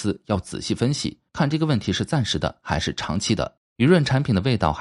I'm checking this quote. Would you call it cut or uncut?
cut